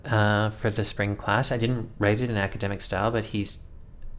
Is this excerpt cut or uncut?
uncut